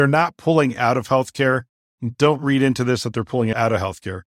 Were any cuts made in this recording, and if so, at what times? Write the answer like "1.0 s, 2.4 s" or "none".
none